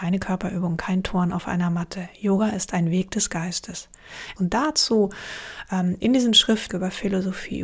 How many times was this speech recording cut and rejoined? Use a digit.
2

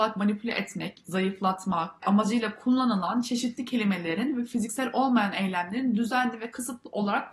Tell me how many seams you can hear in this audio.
2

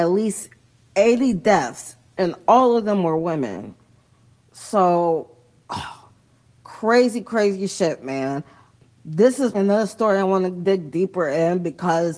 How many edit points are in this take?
1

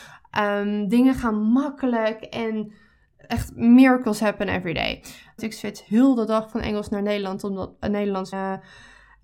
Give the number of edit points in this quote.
2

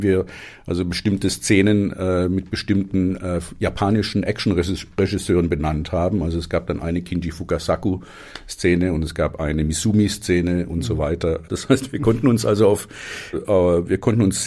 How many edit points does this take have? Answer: 2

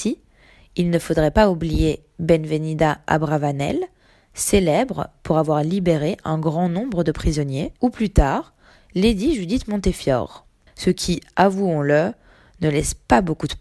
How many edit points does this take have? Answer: 2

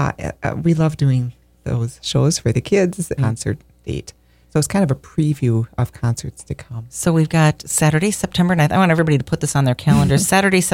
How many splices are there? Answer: 1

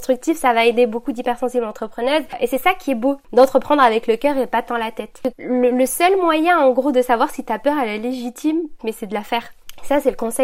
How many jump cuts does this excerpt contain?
2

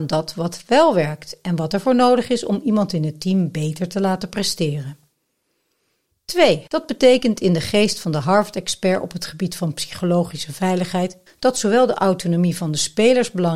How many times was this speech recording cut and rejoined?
2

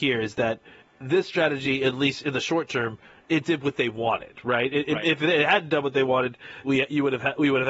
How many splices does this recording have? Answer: 1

